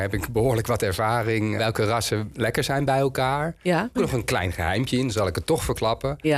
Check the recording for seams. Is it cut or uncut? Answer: cut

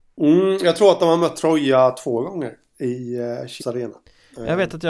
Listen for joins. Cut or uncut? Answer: cut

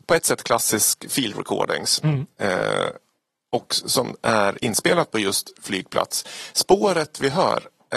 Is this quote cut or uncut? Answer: uncut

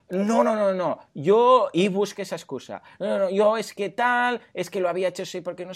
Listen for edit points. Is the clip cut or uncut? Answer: uncut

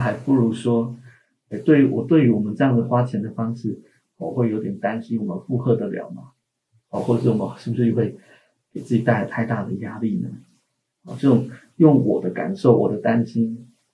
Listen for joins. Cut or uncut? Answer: uncut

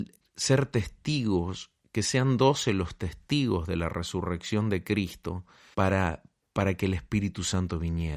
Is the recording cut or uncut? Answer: cut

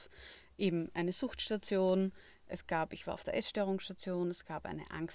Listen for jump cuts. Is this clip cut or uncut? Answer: uncut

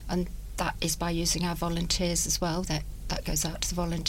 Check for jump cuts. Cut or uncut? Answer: cut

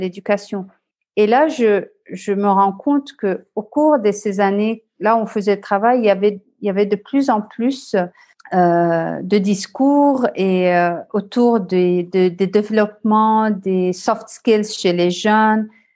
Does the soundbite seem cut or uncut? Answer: uncut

